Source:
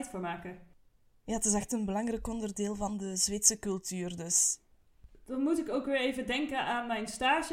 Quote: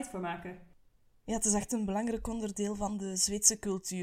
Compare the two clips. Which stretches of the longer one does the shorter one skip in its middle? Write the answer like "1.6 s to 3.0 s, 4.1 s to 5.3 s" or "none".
none